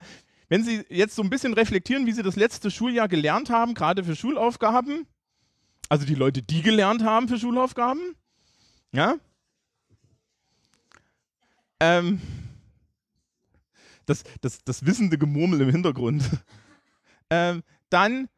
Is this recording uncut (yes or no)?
yes